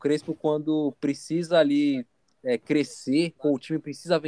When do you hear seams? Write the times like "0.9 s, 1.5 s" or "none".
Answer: 3.4 s

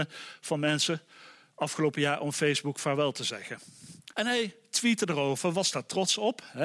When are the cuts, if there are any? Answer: 4.1 s

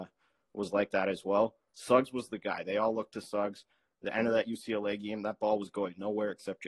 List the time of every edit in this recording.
none

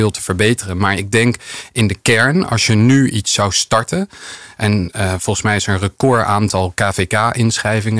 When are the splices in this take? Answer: none

